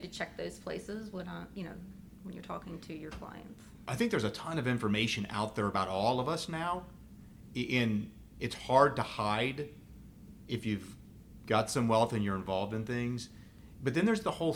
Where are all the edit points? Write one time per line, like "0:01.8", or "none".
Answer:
0:03.9